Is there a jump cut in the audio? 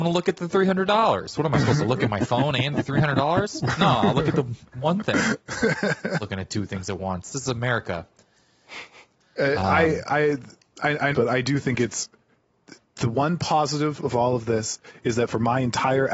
yes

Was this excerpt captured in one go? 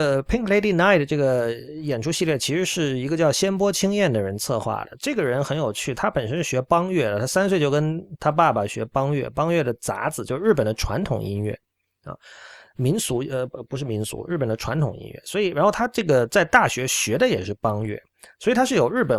yes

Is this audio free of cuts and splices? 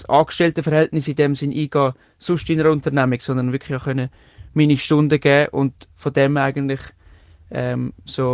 yes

